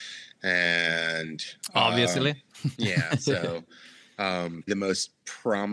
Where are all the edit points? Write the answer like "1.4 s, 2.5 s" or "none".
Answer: 2.7 s, 4.7 s